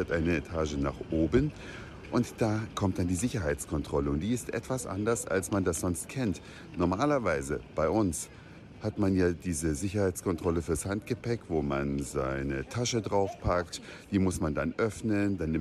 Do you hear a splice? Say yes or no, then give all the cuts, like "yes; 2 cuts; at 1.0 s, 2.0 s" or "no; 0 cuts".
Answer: no; 0 cuts